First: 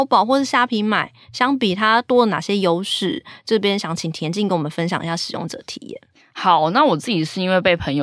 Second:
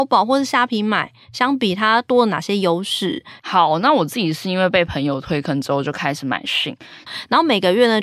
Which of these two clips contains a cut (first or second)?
second